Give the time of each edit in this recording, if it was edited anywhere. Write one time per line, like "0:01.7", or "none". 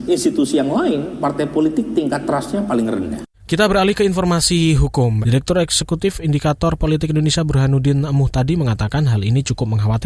0:03.3
0:05.2